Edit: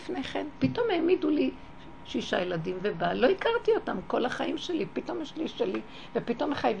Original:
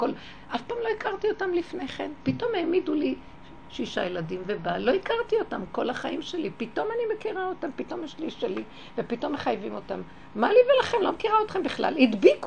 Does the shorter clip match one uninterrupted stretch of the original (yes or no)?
no